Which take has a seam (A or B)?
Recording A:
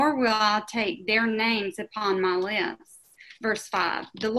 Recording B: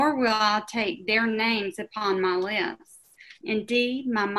B